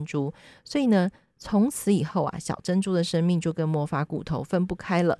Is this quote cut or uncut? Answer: uncut